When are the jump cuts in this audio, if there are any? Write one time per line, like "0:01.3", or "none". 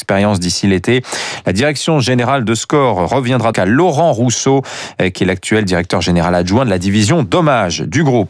0:03.5